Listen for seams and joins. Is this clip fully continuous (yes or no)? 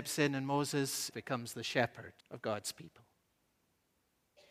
no